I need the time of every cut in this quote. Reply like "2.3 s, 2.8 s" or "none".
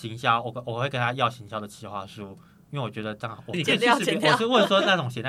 3.5 s